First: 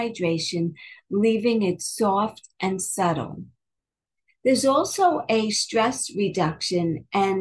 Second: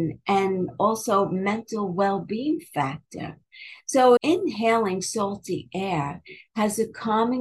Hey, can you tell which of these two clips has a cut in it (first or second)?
second